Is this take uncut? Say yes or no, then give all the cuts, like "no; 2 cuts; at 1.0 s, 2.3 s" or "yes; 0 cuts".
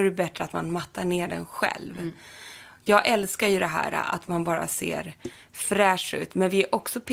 yes; 0 cuts